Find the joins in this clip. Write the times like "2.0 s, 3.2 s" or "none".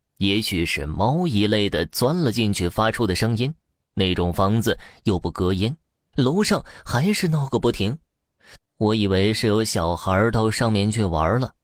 6.1 s, 8.6 s